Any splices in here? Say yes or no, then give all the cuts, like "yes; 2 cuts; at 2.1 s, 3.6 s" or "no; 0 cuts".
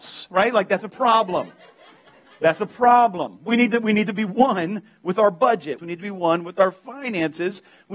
yes; 1 cut; at 5.8 s